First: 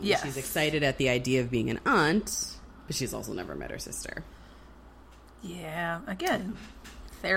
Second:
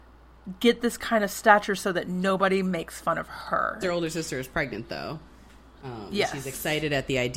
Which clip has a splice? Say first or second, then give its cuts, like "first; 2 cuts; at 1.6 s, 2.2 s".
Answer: second; 1 cut; at 3.8 s